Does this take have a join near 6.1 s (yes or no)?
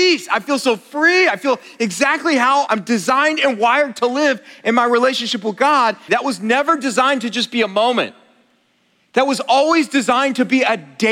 yes